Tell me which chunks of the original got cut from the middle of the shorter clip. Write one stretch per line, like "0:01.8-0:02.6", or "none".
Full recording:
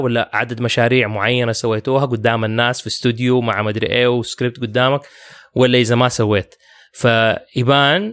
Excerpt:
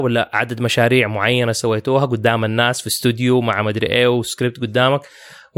none

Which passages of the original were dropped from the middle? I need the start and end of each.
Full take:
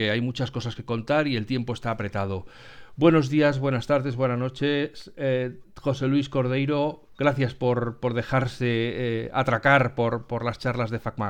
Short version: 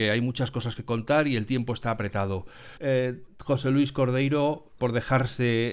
0:02.8-0:05.1
0:07.2-0:08.0

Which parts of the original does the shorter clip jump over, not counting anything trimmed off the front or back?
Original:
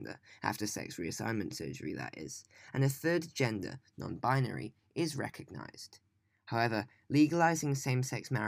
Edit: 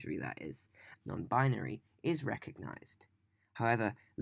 0:02.7-0:03.9

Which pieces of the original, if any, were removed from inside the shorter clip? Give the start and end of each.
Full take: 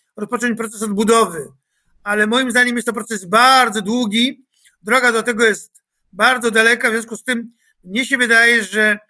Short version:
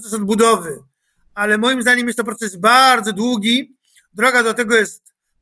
none

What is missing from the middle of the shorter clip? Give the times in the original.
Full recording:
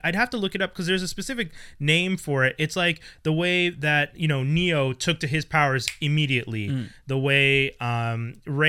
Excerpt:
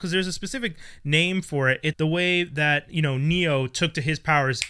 0:02.7-0:03.2

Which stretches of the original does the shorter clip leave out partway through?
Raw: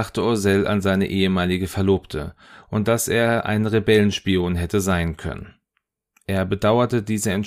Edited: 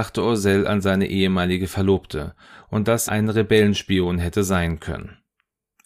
0:03.1-0:03.4

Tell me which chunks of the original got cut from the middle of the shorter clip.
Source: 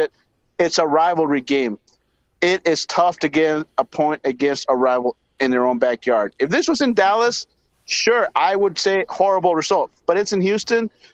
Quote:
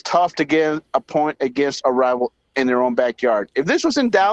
none

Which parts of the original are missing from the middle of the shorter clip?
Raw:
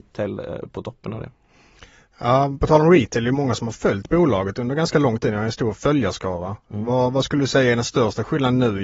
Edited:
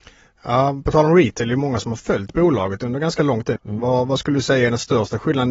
0:05.3-0:06.6

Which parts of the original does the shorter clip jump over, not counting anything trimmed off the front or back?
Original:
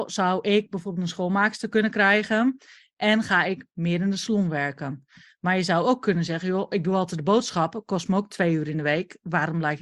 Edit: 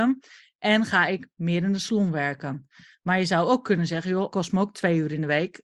0:06.7-0:07.9

